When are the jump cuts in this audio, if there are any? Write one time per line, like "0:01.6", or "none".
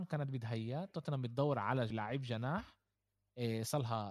0:01.9